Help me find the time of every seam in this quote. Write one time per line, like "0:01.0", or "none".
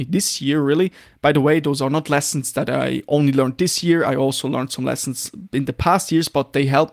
none